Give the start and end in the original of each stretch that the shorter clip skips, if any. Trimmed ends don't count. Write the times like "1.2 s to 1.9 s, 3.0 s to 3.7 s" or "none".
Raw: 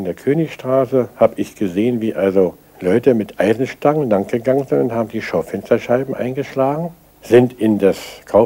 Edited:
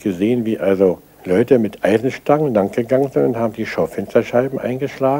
none